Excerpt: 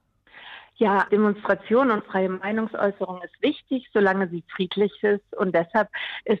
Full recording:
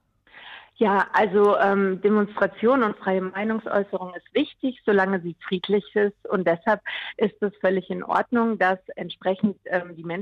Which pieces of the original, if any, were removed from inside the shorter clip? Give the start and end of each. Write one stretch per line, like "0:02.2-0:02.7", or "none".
0:01.1-0:02.0